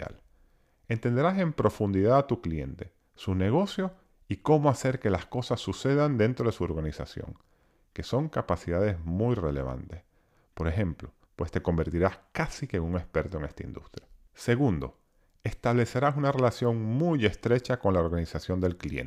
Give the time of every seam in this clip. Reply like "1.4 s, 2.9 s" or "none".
11.3 s